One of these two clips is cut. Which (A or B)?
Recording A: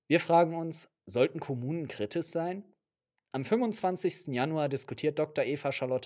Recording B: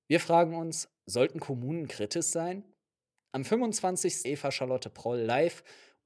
B